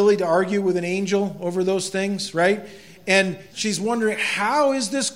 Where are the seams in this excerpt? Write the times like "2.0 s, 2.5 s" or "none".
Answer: 3.5 s